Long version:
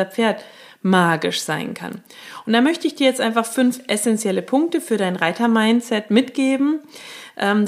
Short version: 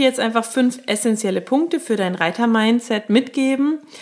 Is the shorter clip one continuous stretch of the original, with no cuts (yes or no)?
yes